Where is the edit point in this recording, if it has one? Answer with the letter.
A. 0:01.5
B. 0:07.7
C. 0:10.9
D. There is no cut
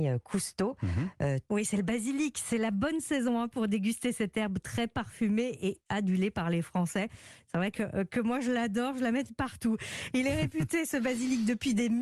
A